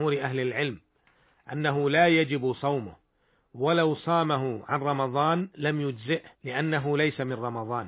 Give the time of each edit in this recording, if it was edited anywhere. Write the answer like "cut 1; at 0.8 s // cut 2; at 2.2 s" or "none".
cut 1; at 6.3 s